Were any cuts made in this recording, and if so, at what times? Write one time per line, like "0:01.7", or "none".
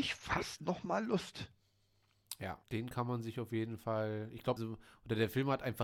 0:02.6
0:04.6